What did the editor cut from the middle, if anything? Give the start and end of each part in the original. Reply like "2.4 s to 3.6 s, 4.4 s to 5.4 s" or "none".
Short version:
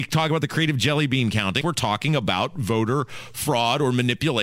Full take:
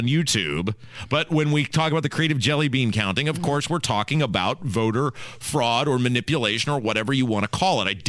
3.2 s to 3.7 s